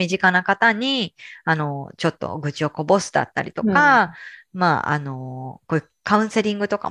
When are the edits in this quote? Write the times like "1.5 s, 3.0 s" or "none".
none